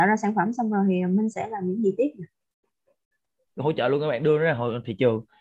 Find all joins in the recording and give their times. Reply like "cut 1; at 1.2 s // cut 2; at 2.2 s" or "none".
cut 1; at 3.6 s